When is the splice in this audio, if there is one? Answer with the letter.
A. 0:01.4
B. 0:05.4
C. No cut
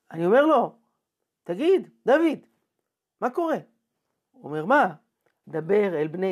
B